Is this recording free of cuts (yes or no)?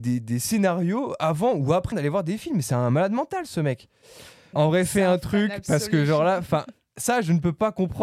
no